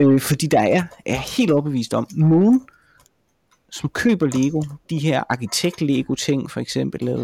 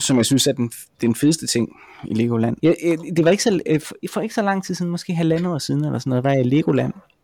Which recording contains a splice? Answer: second; 1 cut; at 2.6 s

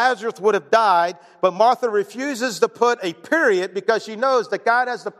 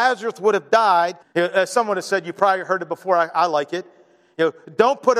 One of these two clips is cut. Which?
second; 1 cut; at 1.2 s

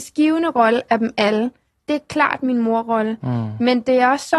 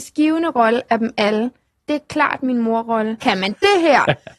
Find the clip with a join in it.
second; 1 cut; at 3.2 s

